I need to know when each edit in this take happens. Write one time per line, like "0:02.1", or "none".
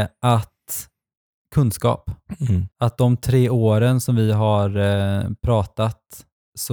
0:02.7